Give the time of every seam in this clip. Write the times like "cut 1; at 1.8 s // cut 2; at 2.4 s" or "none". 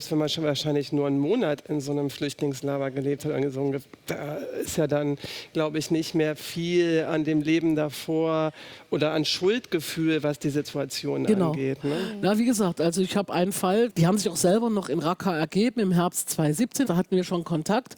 cut 1; at 13.9 s // cut 2; at 16.8 s